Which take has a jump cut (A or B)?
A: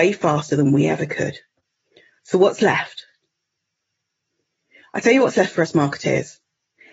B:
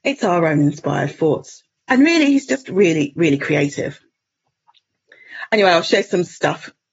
B